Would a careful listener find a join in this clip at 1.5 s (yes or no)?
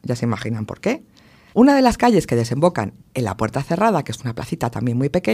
yes